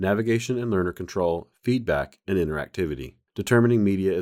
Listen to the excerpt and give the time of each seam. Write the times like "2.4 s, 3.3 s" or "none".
none